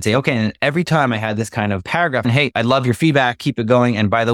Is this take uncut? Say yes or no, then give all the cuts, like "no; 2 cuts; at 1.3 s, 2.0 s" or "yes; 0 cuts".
no; 1 cut; at 2.2 s